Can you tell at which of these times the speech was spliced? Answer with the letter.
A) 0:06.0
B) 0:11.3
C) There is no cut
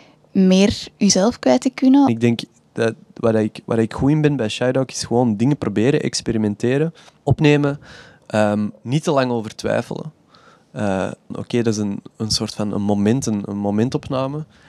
B